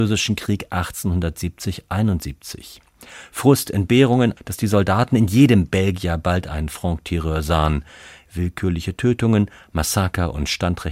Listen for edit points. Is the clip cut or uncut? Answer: cut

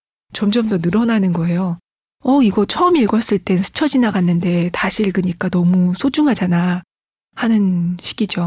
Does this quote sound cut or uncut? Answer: uncut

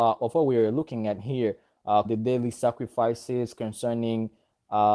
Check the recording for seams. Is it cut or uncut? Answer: cut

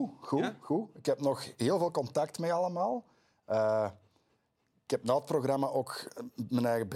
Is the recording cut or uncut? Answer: uncut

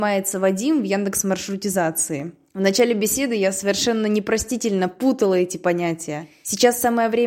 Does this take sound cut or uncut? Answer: uncut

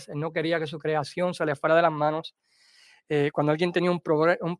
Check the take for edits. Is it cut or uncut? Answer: uncut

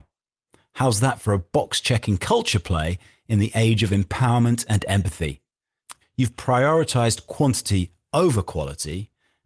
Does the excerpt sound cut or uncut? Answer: cut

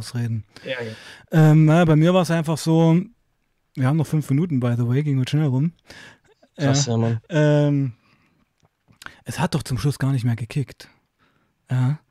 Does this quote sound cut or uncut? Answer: uncut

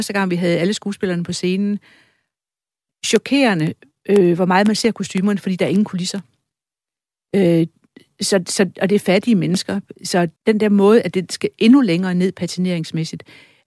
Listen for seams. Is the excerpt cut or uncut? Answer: cut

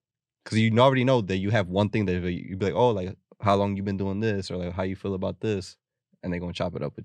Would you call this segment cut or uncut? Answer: uncut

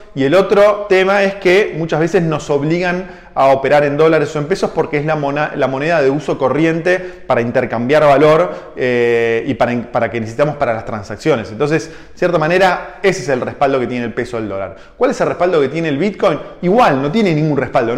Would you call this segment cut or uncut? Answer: uncut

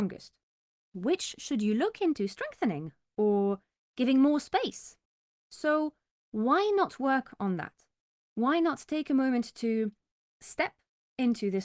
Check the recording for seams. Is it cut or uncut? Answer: uncut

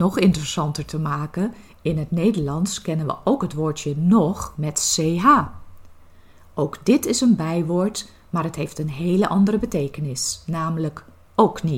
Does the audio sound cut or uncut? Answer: uncut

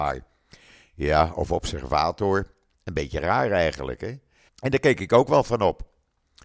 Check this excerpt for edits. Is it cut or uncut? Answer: cut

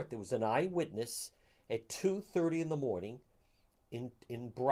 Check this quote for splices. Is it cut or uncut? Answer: uncut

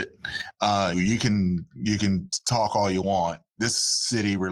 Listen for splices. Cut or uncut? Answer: cut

